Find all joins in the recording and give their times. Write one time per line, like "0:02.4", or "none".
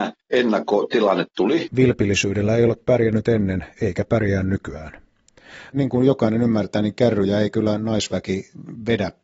0:01.7
0:05.7